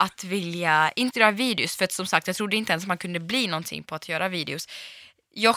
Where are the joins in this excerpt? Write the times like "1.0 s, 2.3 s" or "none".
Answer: 1.1 s